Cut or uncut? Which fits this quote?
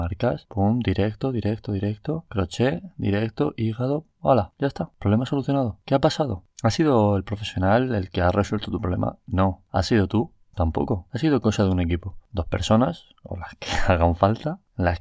uncut